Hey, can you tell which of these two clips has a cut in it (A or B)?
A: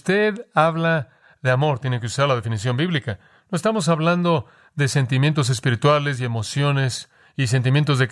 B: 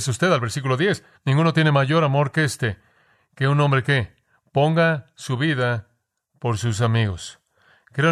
B